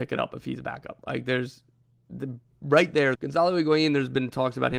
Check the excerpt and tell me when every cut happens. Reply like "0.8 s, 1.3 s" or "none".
3.2 s